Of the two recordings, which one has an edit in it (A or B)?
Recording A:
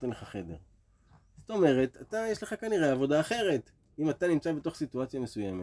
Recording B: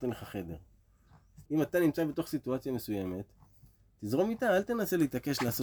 B